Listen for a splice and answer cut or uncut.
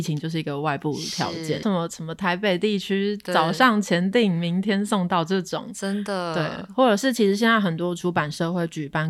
cut